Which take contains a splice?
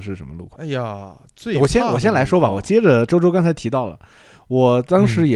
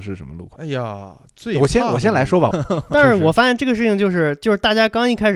second; 1 cut; at 2.5 s

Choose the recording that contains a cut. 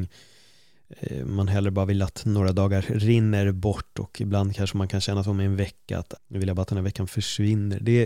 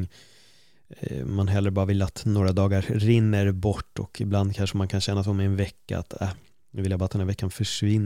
first; 1 cut; at 6.2 s

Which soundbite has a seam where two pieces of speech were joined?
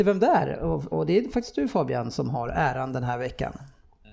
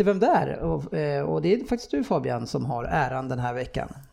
first; 1 cut; at 0.9 s

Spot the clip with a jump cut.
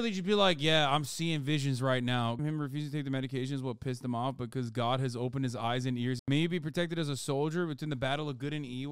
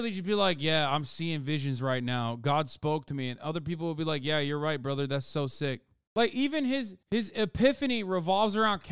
first; 2 cuts; at 2.4 s, 6.2 s

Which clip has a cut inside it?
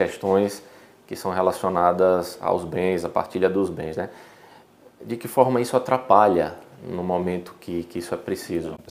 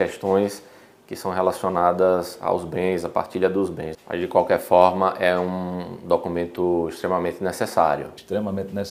second; 1 cut; at 3.9 s

